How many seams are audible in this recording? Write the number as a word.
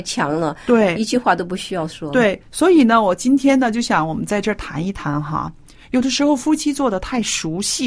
zero